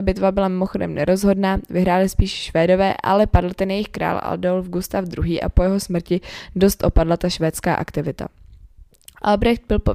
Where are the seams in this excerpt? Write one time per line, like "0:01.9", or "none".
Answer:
none